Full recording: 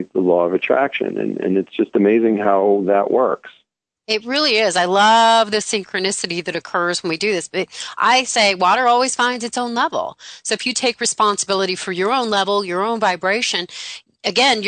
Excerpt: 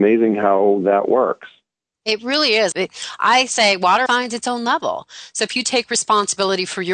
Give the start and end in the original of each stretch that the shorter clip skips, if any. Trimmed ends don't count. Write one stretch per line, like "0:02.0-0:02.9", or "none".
0:04.7-0:07.5
0:08.8-0:09.2